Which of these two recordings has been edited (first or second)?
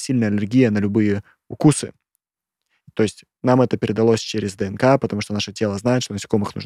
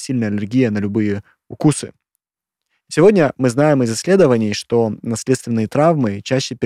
second